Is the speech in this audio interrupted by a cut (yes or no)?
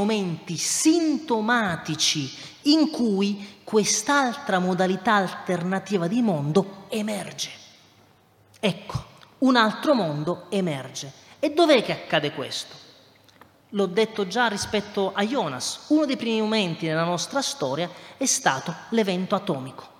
no